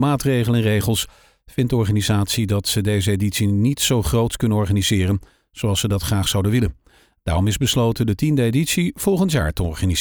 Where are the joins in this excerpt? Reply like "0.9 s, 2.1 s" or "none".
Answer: none